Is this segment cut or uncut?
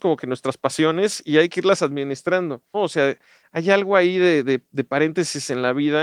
cut